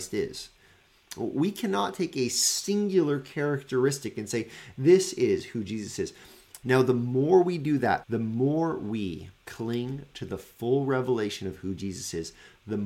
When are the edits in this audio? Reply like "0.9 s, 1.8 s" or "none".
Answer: 6.6 s, 8.0 s, 9.4 s